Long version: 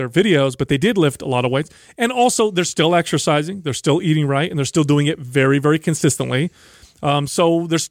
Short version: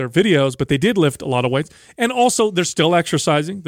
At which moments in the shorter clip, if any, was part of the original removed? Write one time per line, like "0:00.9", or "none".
none